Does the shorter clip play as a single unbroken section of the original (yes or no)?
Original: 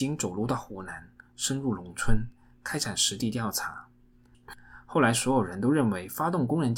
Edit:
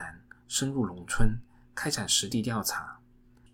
yes